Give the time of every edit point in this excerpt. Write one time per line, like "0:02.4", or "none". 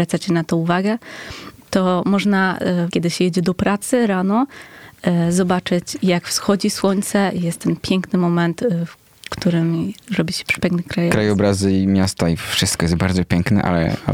0:02.9